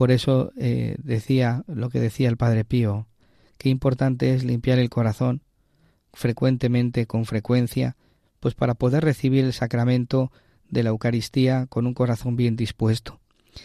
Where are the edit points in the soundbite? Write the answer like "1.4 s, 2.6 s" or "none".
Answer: none